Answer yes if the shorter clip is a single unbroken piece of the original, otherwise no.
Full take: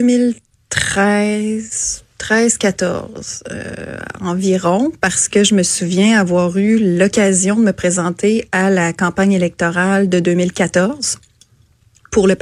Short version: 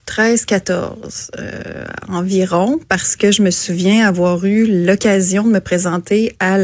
yes